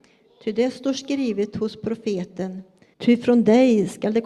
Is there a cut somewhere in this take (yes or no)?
yes